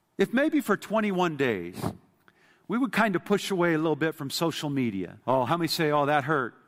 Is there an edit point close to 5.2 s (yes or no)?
yes